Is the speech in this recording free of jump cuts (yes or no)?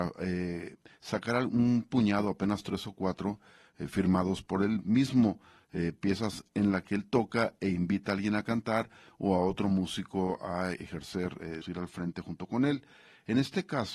no